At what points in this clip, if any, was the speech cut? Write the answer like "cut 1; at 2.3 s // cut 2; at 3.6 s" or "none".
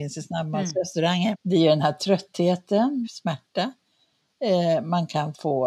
cut 1; at 1.3 s // cut 2; at 3.0 s

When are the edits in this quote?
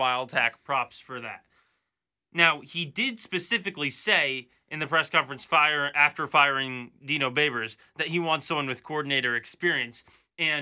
none

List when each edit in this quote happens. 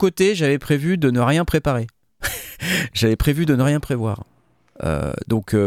none

